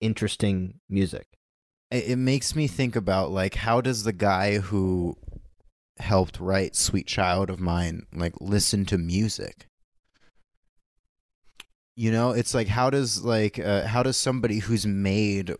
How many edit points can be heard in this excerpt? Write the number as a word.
one